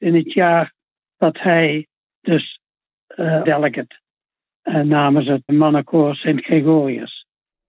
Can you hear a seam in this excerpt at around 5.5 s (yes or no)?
yes